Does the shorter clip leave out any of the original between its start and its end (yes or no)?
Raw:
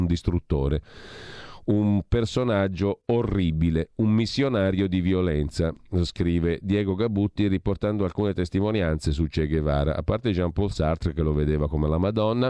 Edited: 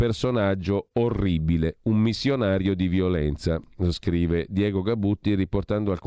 no